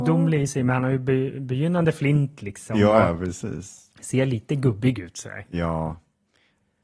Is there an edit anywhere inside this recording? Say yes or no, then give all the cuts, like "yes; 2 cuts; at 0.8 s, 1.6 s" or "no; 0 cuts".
no; 0 cuts